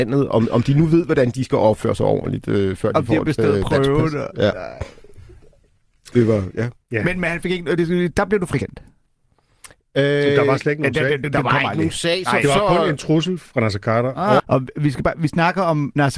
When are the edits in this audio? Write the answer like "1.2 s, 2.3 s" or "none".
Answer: 14.4 s